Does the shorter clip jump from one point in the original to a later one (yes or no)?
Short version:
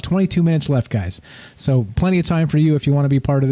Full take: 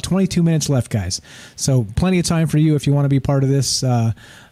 no